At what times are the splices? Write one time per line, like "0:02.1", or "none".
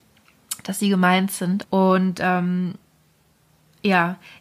0:01.6